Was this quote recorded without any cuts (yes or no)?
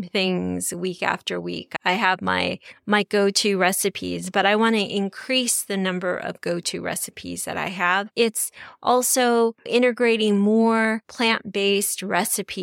yes